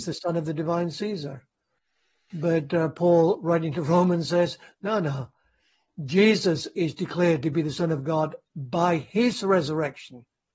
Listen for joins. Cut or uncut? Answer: uncut